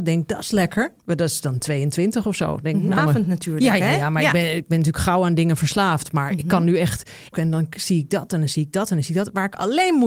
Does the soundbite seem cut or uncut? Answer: cut